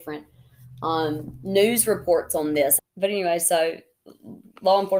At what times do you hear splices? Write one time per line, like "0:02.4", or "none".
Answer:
0:02.8